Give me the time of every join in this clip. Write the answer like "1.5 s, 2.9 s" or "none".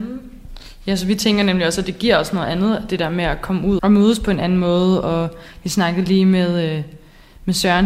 3.8 s